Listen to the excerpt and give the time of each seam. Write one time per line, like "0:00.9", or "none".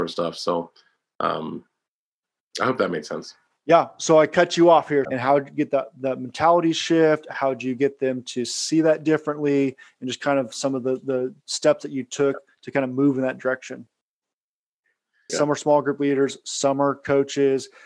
0:05.0
0:15.3